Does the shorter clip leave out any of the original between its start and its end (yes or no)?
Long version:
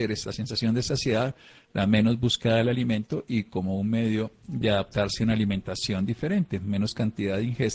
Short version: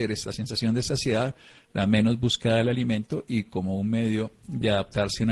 no